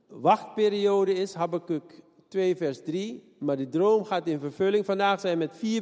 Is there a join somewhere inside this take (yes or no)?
no